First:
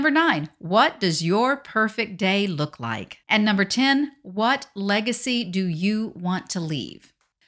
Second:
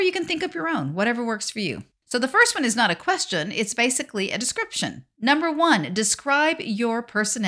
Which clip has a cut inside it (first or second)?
first